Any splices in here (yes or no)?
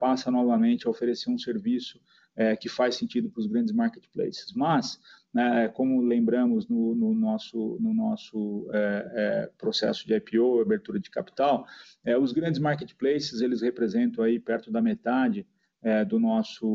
no